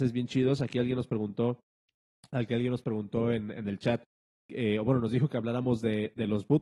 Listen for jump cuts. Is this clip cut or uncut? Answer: uncut